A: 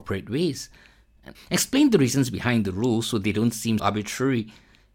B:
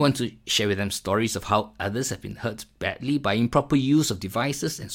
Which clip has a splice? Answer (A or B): A